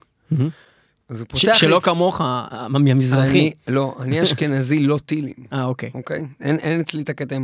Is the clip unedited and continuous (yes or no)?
yes